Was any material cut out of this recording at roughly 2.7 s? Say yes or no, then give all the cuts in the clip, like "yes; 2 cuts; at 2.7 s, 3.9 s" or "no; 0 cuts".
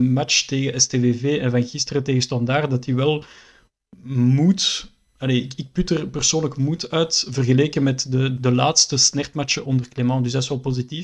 no; 2 cuts; at 8.4 s, 9.6 s